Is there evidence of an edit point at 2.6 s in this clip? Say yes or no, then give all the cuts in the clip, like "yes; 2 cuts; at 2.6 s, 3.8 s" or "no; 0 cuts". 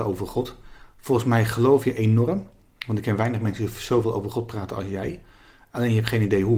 no; 0 cuts